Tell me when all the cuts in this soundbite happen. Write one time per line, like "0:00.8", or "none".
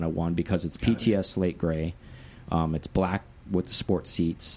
none